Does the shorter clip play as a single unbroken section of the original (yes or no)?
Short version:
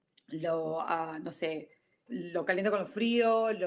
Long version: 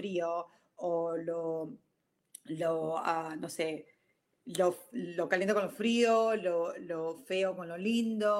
no